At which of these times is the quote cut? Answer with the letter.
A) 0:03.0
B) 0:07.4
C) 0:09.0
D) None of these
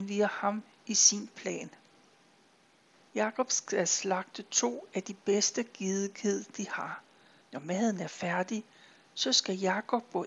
B